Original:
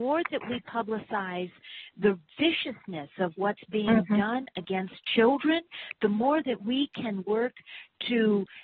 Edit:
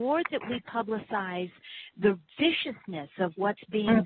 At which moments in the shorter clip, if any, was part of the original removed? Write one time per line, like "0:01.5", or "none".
none